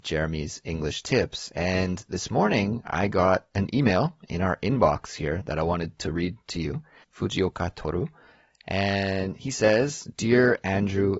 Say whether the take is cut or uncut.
cut